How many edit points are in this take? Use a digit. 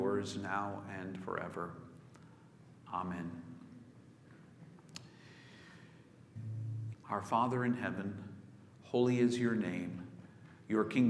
1